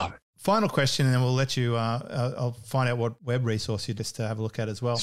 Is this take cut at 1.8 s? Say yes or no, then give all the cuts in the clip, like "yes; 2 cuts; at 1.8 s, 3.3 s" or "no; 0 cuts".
no; 1 cut; at 4.0 s